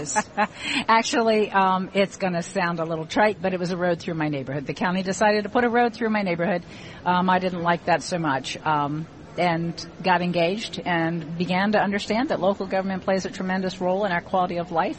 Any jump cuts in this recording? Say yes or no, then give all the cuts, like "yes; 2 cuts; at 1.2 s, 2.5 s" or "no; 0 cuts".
no; 0 cuts